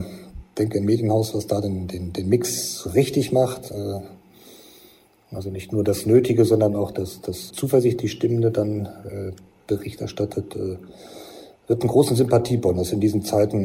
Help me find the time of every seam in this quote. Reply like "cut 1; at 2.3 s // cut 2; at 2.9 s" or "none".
cut 1; at 7.5 s